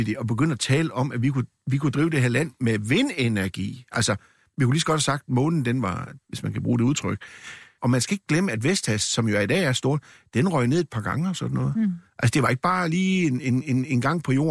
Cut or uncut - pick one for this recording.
cut